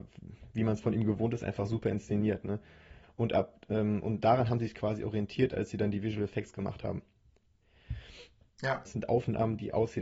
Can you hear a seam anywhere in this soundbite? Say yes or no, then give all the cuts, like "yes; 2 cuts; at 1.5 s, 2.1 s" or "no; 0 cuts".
yes; 2 cuts; at 3.0 s, 8.9 s